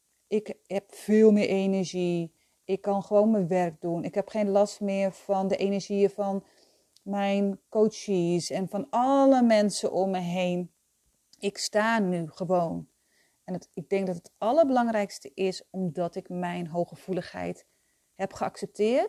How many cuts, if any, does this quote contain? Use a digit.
0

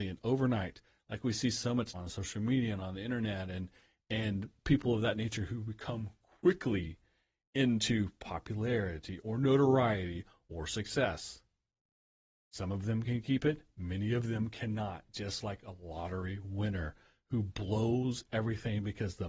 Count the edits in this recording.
1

